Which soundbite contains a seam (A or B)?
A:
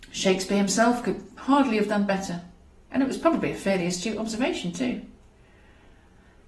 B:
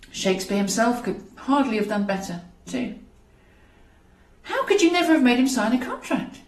B